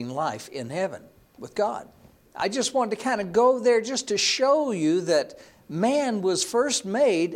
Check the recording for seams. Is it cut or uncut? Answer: cut